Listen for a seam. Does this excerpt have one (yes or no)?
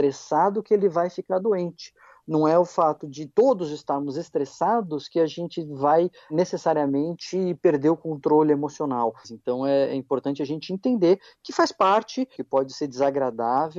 yes